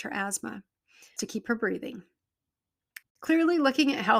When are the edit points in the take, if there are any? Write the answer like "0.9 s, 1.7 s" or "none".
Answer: 1.2 s, 3.0 s